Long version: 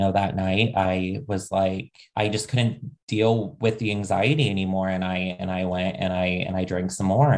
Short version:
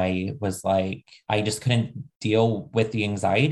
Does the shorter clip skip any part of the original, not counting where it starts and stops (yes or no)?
no